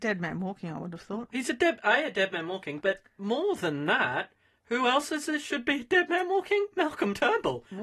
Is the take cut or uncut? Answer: uncut